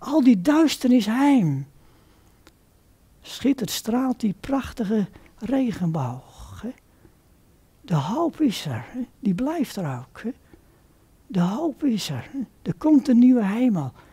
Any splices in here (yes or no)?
no